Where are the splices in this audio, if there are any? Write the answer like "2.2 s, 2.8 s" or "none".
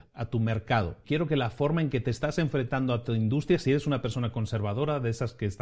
1.0 s